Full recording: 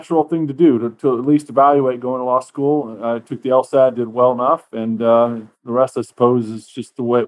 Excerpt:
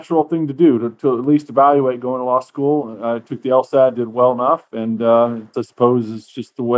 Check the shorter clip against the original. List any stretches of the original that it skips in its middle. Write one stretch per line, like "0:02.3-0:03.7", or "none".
0:05.5-0:05.9